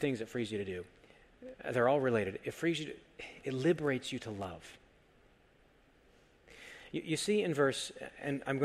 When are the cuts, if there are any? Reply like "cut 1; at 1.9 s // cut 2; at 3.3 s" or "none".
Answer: cut 1; at 3.4 s